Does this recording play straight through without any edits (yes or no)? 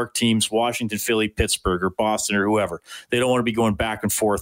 yes